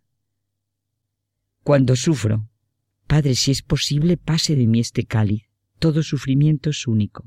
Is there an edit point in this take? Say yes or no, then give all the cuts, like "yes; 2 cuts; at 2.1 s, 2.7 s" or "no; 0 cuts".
yes; 2 cuts; at 2.9 s, 5.7 s